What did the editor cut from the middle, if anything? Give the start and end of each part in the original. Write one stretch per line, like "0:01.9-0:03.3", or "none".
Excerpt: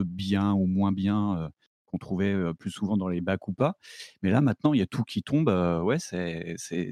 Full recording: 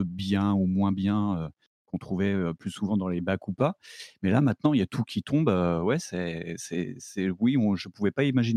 none